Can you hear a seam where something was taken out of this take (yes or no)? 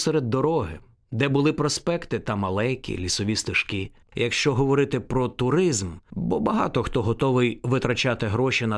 yes